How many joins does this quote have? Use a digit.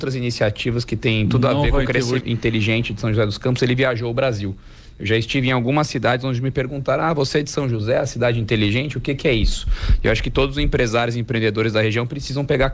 1